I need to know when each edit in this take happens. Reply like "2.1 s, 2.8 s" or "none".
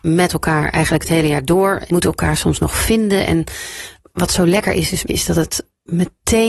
1.9 s, 5.1 s